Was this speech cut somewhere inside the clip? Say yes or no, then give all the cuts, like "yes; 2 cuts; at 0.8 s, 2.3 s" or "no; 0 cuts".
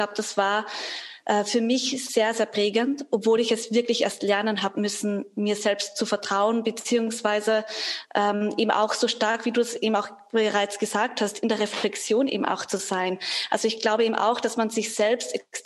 no; 0 cuts